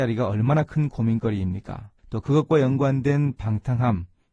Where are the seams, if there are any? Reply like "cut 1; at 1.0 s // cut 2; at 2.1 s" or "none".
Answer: cut 1; at 2.0 s